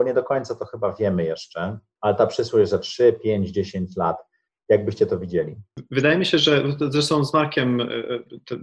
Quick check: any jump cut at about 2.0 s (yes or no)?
yes